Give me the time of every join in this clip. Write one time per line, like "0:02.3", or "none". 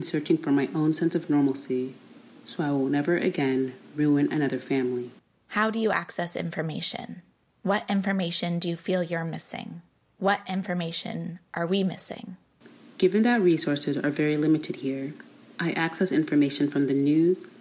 none